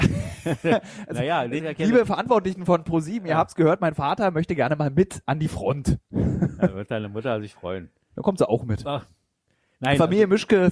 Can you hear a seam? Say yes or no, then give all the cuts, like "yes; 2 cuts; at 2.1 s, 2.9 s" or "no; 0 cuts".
yes; 1 cut; at 1.6 s